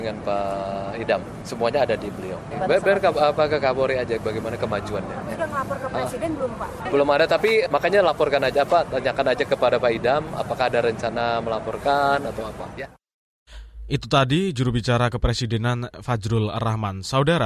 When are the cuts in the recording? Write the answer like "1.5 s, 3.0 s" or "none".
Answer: none